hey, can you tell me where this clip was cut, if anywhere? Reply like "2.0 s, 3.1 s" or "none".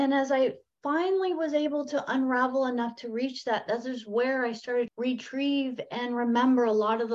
4.9 s